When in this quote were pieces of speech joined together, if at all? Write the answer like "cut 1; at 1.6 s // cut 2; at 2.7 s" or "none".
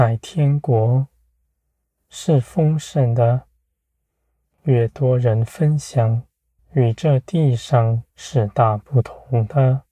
cut 1; at 6.6 s // cut 2; at 8.1 s